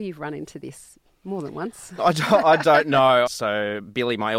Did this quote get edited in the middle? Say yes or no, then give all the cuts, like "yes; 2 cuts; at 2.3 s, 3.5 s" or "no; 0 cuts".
yes; 2 cuts; at 2.0 s, 3.3 s